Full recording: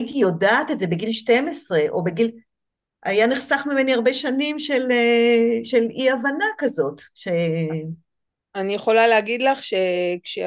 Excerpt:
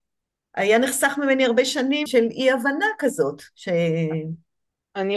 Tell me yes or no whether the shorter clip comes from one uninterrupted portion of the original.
no